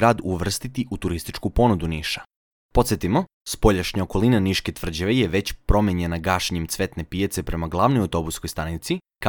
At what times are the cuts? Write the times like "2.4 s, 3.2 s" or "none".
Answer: 2.6 s